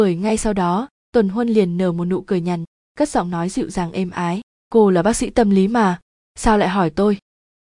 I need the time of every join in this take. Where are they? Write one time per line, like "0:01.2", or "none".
0:02.6